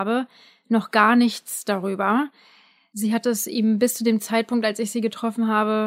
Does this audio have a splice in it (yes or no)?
no